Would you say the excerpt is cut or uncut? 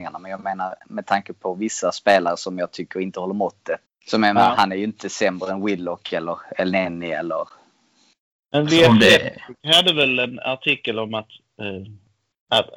cut